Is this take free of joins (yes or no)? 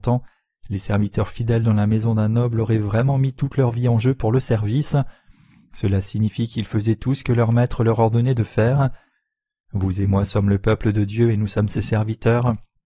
yes